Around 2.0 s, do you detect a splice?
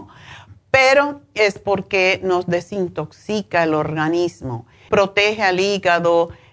no; 1 cut; at 4.9 s

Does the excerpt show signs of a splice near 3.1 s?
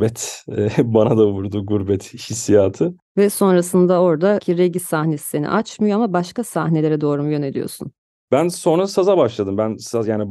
yes; 1 cut; at 3.1 s

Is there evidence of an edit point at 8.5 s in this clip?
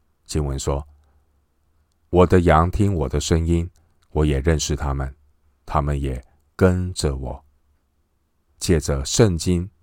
yes; 1 cut; at 8.5 s

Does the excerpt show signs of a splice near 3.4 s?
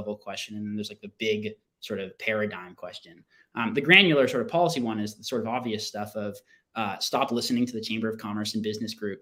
no; 0 cuts

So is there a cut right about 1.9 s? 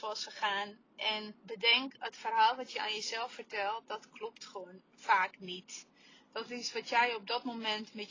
no; 0 cuts

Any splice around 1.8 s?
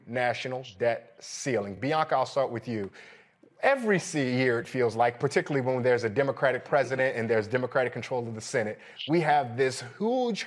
no; 0 cuts

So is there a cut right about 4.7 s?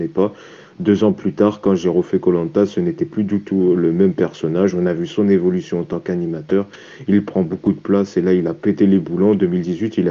no; 0 cuts

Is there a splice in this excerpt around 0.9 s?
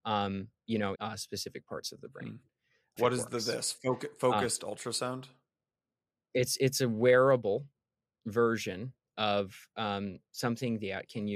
yes; 2 cuts; at 0.9 s, 3.0 s

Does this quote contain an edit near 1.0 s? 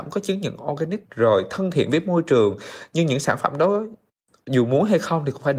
yes; 1 cut; at 1.0 s

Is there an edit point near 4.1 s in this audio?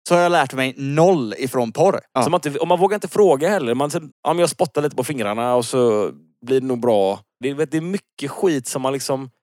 yes; 3 cuts; at 2.2 s, 4.1 s, 7.4 s

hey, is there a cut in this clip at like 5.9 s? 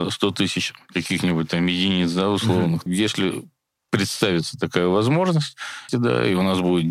yes; 2 cuts; at 2.9 s, 5.9 s

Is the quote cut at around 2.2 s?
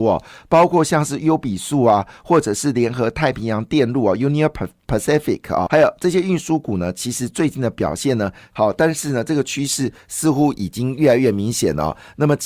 no; 2 cuts; at 5.7 s, 8.5 s

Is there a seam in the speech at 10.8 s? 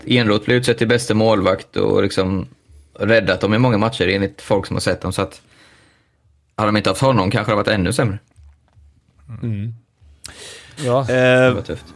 yes; 1 cut; at 10.8 s

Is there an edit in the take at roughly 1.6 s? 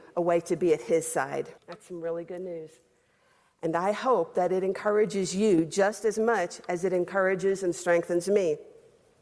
yes; 1 cut; at 1.6 s

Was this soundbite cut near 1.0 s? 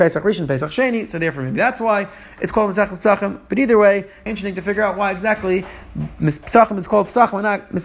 no; 1 cut; at 4.3 s

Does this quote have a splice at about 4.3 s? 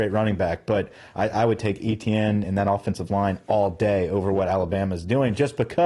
no; 1 cut; at 2.4 s

